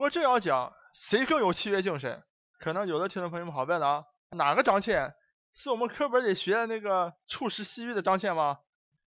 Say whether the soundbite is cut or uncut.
cut